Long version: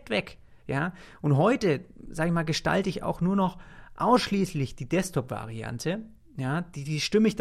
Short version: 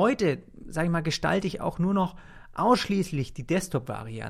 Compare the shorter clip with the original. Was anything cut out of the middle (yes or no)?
no